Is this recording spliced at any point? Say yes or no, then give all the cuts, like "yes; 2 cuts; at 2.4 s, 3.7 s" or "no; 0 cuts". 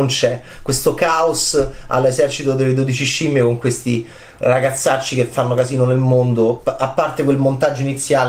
yes; 1 cut; at 6.6 s